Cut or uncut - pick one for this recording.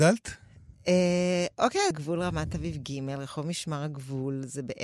cut